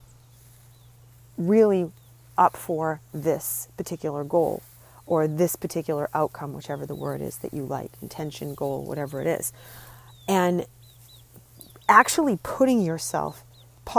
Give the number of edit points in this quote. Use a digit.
0